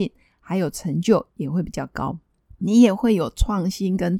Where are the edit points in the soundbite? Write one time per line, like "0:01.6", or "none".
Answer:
0:02.5